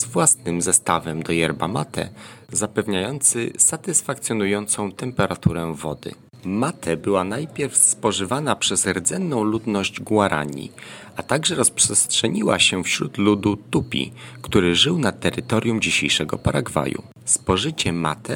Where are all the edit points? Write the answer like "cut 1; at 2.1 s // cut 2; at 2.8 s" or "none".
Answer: cut 1; at 2.4 s